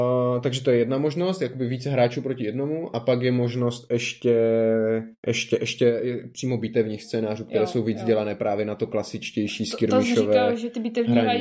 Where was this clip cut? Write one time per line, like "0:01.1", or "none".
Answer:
0:05.2